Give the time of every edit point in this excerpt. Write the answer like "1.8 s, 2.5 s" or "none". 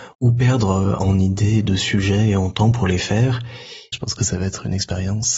3.9 s